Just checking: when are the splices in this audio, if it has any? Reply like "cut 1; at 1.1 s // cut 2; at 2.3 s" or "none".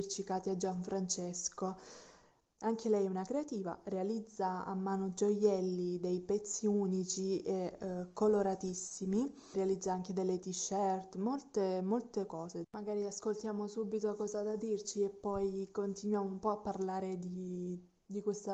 cut 1; at 9.5 s // cut 2; at 12.6 s